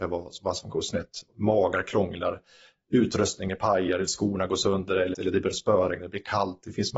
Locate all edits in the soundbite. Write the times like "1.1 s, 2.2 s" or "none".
5.1 s